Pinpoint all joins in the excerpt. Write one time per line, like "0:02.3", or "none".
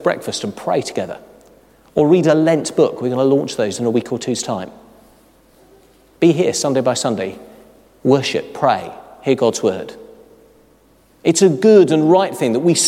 none